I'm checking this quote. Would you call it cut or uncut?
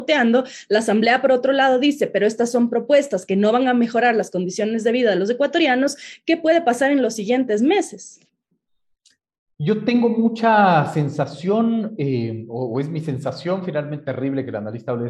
uncut